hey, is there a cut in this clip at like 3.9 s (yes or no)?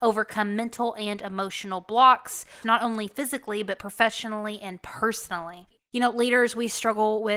no